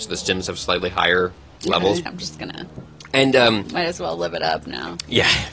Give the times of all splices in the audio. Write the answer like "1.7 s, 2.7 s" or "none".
2.1 s, 3.6 s

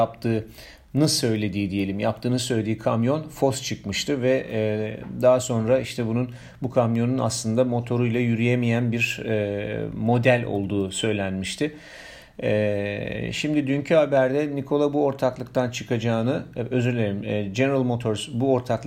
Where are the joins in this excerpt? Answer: none

